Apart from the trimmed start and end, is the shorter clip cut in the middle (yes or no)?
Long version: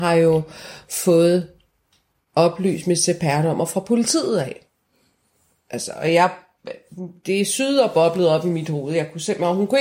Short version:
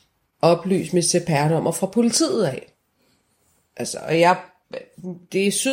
no